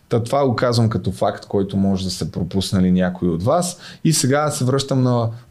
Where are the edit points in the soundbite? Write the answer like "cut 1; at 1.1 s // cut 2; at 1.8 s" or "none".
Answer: none